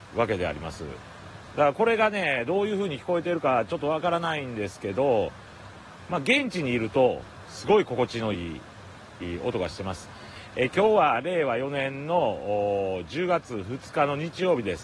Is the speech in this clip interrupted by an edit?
no; 0 cuts

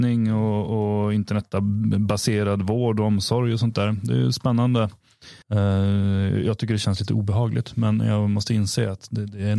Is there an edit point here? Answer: yes; 1 cut; at 5.4 s

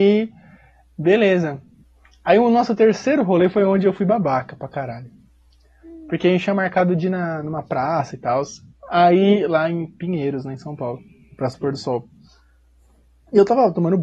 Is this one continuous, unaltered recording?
yes; 0 cuts

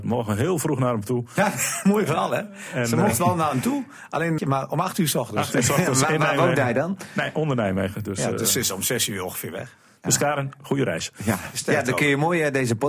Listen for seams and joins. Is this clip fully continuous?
no; 1 cut; at 4.4 s

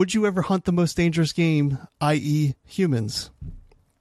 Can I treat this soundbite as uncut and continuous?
no; 1 cut; at 2.6 s

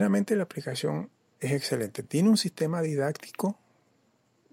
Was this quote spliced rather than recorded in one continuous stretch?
no; 0 cuts

